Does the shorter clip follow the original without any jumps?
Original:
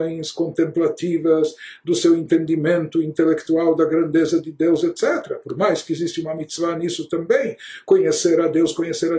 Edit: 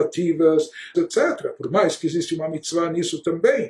no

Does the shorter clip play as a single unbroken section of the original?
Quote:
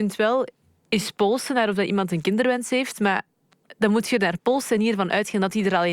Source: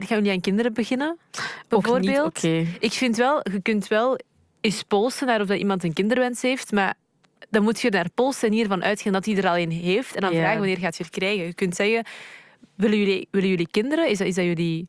yes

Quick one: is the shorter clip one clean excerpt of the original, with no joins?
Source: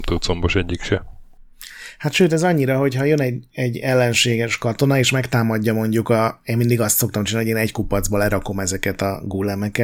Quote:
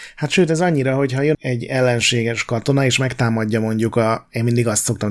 no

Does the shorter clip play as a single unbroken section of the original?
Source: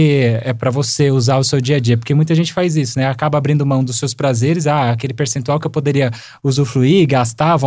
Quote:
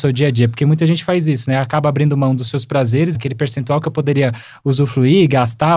no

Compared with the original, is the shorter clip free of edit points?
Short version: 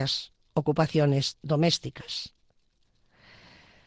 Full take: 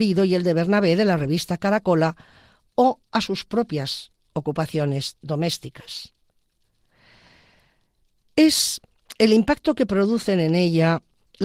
yes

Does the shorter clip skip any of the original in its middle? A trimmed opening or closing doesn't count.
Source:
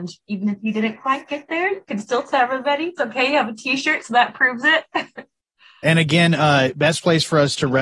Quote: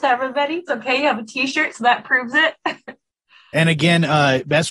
no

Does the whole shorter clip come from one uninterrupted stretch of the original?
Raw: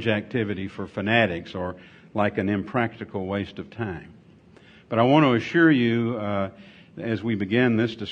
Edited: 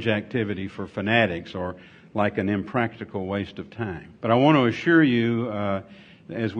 no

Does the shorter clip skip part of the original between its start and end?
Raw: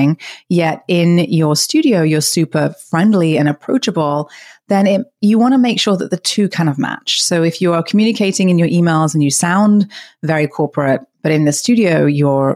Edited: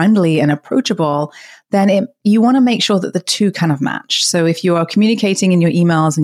no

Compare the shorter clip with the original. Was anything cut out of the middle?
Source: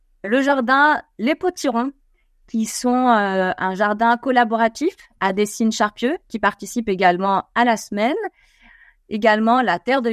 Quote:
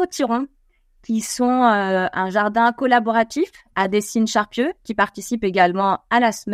no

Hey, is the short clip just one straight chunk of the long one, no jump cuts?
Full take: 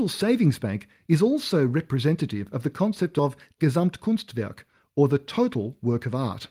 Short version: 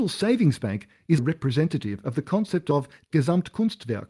no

